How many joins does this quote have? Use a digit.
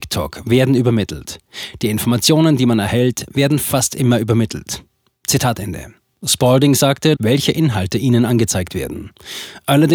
1